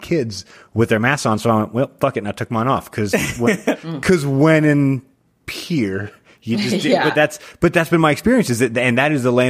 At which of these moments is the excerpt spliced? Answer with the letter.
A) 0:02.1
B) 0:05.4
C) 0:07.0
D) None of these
D